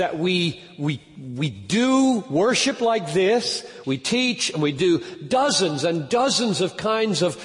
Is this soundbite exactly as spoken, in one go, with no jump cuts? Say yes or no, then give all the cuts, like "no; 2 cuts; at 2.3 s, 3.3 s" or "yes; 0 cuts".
no; 1 cut; at 3.8 s